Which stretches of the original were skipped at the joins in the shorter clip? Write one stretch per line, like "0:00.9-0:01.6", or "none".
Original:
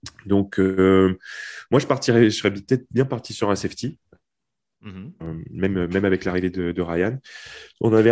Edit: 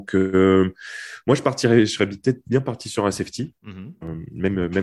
0:04.0-0:04.8